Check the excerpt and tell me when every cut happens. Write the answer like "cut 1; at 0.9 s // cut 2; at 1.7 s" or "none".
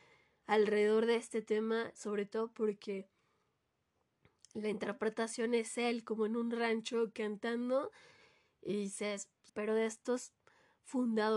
cut 1; at 9.5 s